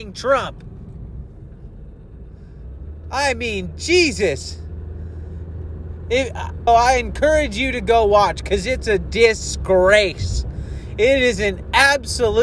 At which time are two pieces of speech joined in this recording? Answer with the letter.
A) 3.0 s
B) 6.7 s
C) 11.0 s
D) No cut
B